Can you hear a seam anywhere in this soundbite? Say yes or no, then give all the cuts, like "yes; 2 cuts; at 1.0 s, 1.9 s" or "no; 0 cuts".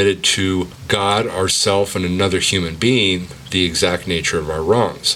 no; 0 cuts